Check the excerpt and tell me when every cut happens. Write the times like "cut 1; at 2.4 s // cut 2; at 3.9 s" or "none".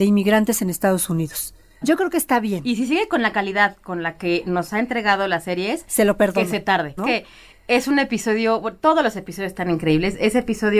cut 1; at 1.8 s // cut 2; at 7.0 s